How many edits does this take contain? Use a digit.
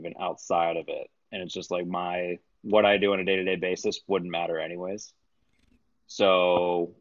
0